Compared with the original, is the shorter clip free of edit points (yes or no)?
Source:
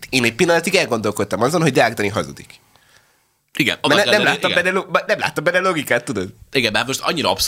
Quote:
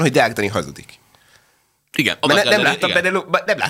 yes